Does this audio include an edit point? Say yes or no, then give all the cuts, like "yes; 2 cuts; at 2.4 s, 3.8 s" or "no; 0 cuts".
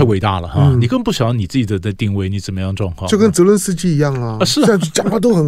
no; 0 cuts